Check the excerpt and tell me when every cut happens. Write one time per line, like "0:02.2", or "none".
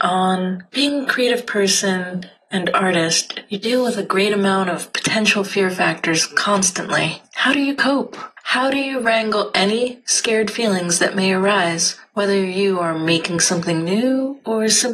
none